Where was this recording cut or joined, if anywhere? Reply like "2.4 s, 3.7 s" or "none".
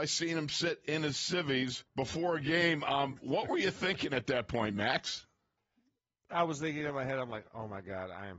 1.9 s